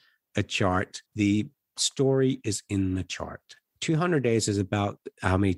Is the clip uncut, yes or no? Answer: no